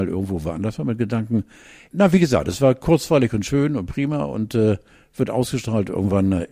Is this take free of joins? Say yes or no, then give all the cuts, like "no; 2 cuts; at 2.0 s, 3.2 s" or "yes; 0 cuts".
yes; 0 cuts